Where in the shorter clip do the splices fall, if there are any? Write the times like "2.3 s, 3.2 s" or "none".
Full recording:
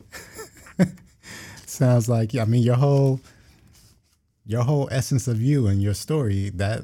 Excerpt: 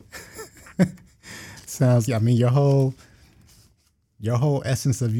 2.1 s